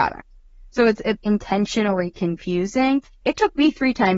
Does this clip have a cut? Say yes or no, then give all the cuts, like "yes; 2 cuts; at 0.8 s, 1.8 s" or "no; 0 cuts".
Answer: yes; 1 cut; at 1.2 s